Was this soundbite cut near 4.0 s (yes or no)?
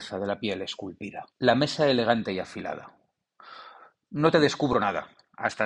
no